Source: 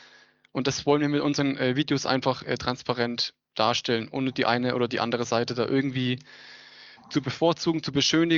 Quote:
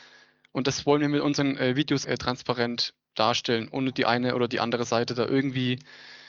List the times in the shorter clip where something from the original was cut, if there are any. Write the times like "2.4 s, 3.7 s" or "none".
2.0 s